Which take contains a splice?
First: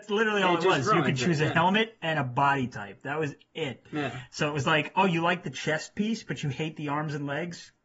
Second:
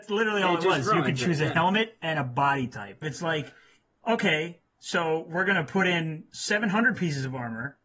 second; 1 cut; at 3.0 s

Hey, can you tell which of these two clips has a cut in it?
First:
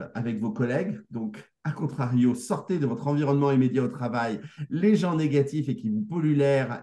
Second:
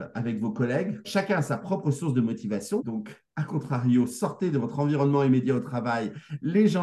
second; 2 cuts; at 1.0 s, 2.8 s

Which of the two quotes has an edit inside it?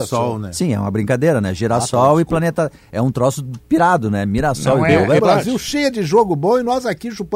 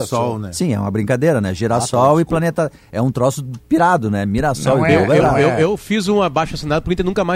first; 1 cut; at 5.2 s

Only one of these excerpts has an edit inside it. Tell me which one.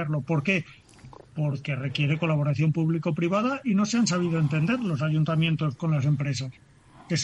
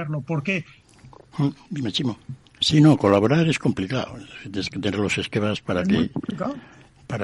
second; 2 cuts; at 1.3 s, 2.4 s

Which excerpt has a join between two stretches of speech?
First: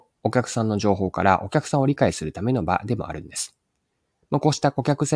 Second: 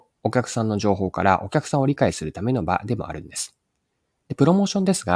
second; 1 cut; at 4.2 s

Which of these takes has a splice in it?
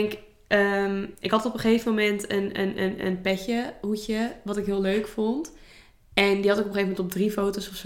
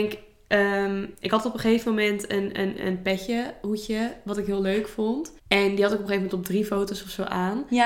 second; 2 cuts; at 2.8 s, 5.4 s

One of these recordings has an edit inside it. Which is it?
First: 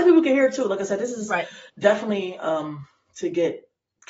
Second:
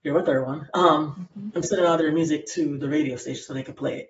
first; 1 cut; at 1.7 s

